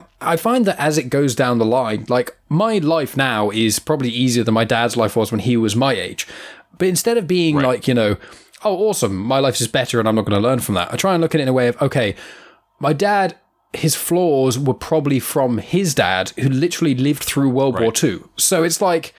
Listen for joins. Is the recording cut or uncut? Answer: uncut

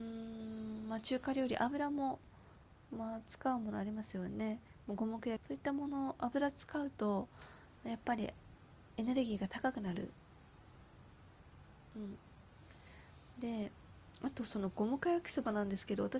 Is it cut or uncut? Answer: cut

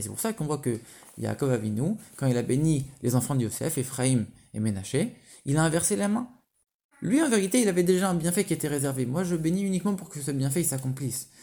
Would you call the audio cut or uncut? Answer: cut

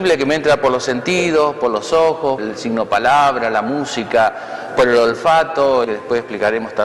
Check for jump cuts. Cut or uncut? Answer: cut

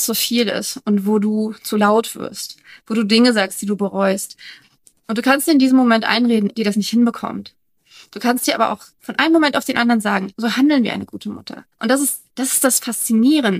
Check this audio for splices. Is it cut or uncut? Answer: cut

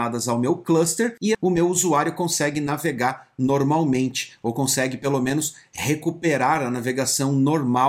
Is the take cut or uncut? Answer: cut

